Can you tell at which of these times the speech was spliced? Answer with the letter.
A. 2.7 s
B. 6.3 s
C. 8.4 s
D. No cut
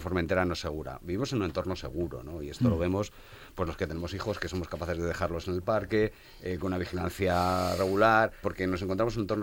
C